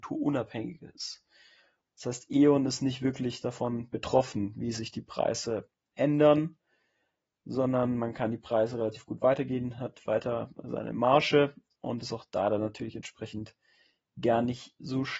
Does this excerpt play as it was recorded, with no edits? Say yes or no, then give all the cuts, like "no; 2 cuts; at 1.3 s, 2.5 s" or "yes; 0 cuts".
no; 1 cut; at 1.8 s